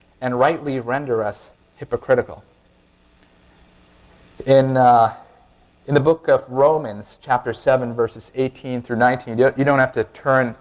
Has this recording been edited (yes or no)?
no